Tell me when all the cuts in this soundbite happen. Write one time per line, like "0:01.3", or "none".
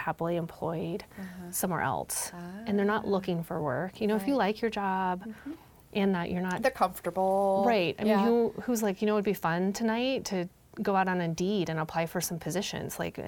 none

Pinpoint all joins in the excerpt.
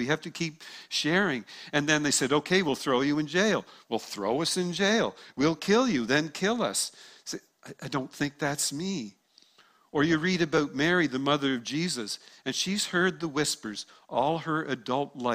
none

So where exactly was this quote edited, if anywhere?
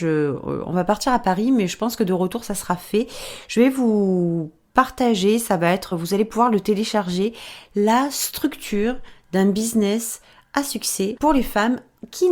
none

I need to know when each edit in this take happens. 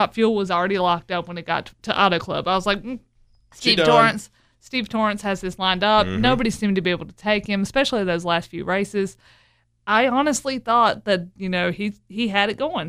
0:01.8

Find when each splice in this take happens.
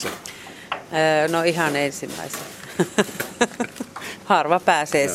0:04.2

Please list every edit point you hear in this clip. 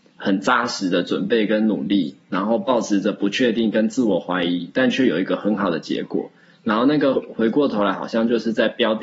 0:07.2

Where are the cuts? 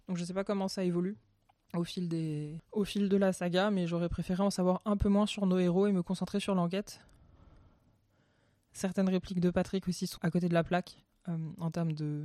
0:10.2

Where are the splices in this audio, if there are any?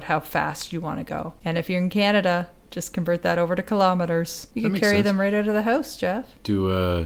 0:04.5

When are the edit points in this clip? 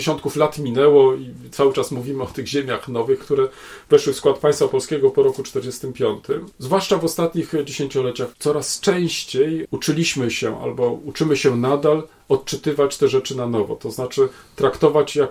0:03.2
0:06.5
0:08.3

